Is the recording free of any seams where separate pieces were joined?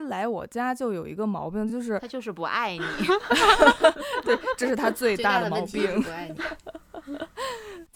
yes; 0 cuts

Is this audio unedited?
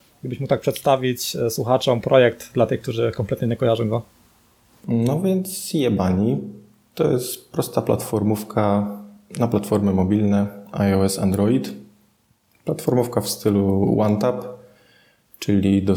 yes; 0 cuts

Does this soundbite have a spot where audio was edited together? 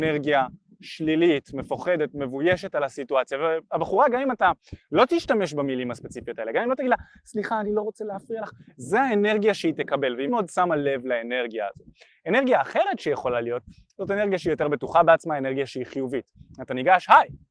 yes; 1 cut; at 10.3 s

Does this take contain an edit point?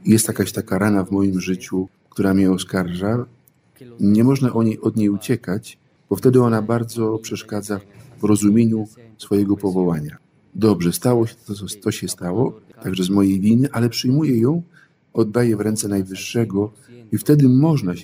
no; 0 cuts

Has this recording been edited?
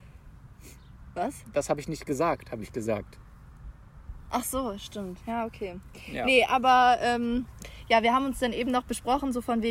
no; 0 cuts

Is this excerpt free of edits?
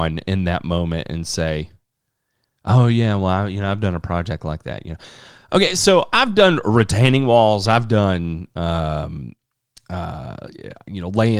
yes; 0 cuts

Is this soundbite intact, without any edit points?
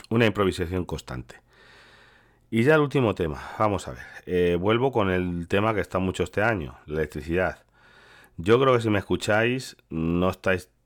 yes; 0 cuts

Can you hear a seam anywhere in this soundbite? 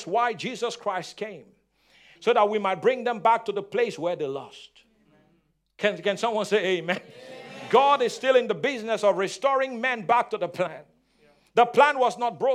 yes; 1 cut; at 2.2 s

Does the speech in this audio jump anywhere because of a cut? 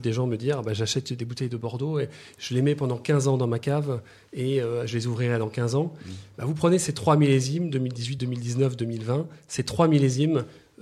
no; 0 cuts

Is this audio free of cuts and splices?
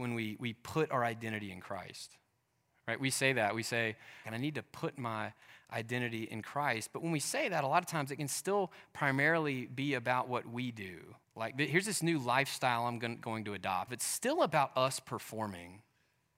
no; 3 cuts; at 4.2 s, 11.2 s, 13.9 s

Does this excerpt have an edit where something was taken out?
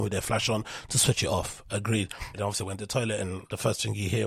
yes; 1 cut; at 2.3 s

